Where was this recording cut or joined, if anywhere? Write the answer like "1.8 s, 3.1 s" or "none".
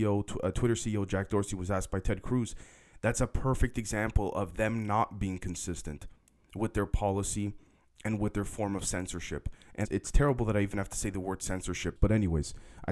9.8 s, 12.0 s